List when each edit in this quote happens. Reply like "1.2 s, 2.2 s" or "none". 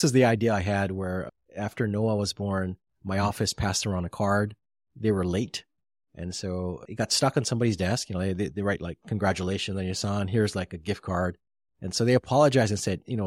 none

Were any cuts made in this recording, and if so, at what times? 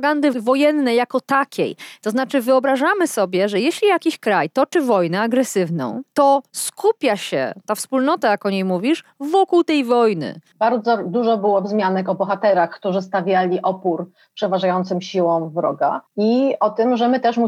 10.5 s, 16.1 s

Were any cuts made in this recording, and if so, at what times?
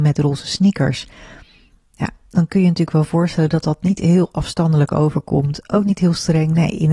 none

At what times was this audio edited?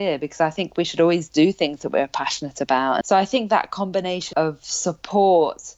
3.0 s, 4.3 s

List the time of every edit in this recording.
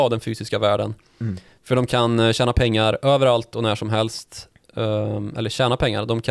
none

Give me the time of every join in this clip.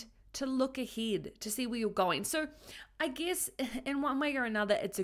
none

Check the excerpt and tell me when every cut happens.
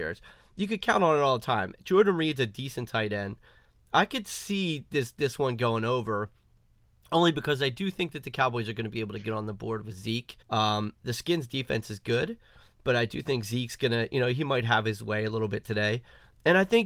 10.4 s

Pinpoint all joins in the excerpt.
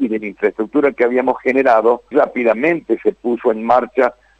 2.1 s

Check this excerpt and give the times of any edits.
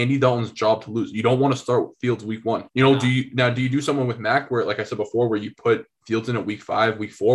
2.7 s

